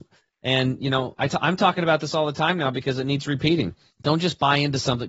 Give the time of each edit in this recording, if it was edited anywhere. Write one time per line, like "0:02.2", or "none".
0:03.9